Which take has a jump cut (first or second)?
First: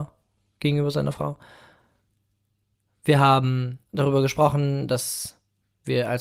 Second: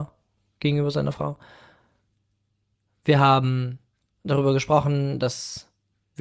first